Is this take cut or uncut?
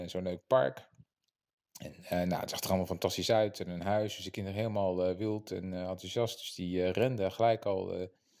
uncut